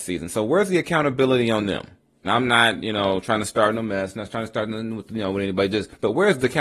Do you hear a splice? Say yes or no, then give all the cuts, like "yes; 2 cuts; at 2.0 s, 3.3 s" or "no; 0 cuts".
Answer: yes; 1 cut; at 2.2 s